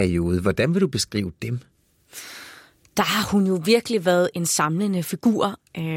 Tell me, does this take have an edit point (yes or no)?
yes